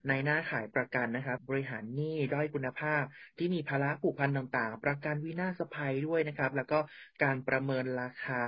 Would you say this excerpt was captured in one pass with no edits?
no; 1 cut; at 1.4 s

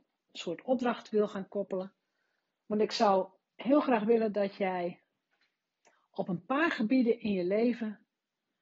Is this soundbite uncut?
yes; 0 cuts

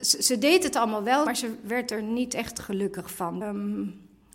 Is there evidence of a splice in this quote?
yes; 2 cuts; at 1.3 s, 3.4 s

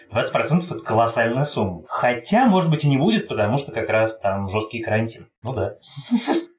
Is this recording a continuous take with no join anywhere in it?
no; 2 cuts; at 1.8 s, 5.4 s

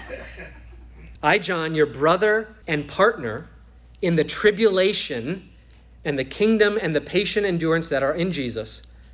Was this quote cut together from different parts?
yes; 2 cuts; at 1.2 s, 2.6 s

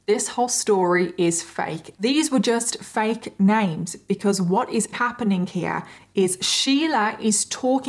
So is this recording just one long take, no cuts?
no; 2 cuts; at 1.9 s, 4.9 s

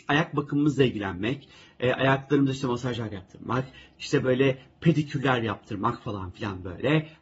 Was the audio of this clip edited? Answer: no; 0 cuts

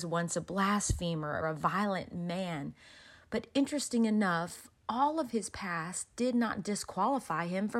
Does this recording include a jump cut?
yes; 1 cut; at 1.4 s

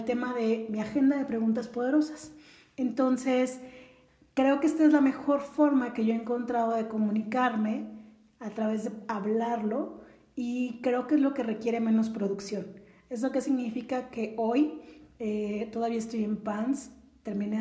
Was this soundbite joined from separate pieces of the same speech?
no; 0 cuts

